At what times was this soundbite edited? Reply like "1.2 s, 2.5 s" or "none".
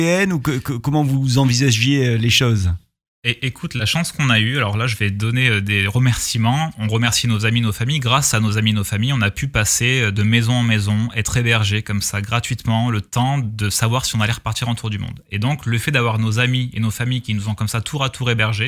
none